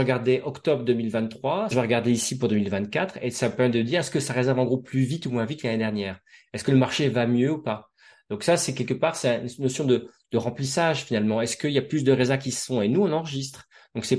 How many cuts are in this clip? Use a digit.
1